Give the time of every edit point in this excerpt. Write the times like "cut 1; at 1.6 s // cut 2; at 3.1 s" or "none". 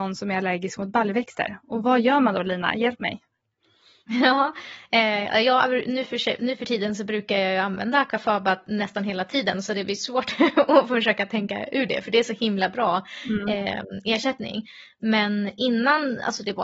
none